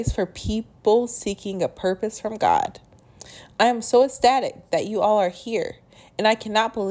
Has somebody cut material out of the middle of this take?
no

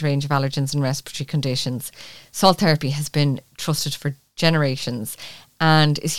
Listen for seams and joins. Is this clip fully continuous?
yes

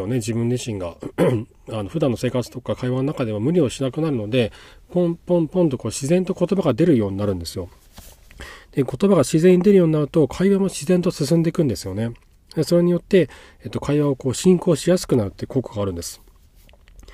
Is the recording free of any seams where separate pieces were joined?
yes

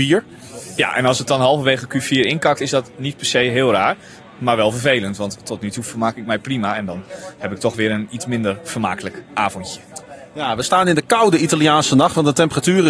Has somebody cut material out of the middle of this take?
no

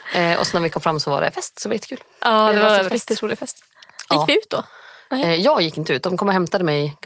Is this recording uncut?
yes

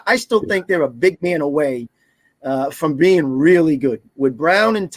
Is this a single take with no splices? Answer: yes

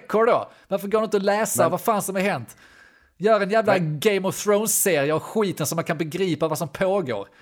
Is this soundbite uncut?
yes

